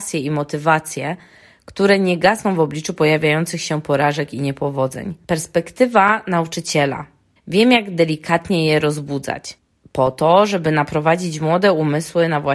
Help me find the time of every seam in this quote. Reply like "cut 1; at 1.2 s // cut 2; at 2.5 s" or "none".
cut 1; at 7.4 s